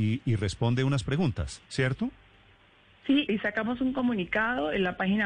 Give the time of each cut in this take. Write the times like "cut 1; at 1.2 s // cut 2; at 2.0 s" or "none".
cut 1; at 3.3 s